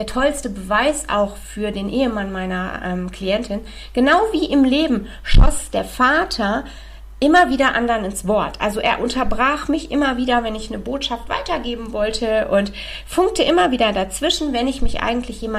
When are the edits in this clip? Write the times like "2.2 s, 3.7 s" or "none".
none